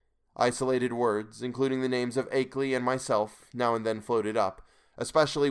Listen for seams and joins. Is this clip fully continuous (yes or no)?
yes